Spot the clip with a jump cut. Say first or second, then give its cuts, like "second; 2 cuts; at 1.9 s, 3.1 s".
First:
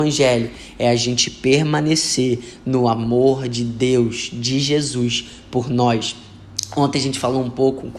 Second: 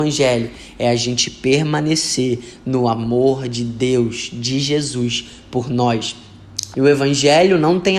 second; 1 cut; at 6.7 s